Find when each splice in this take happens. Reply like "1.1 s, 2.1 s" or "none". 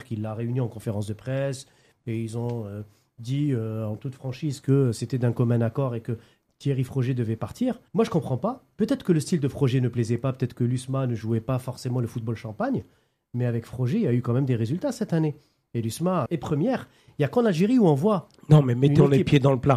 7.9 s, 16.3 s